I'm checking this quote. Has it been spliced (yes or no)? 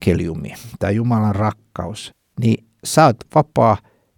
no